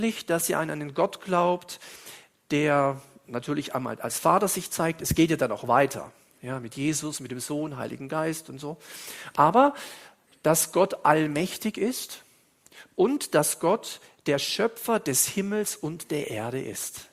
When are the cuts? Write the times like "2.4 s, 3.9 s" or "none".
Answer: none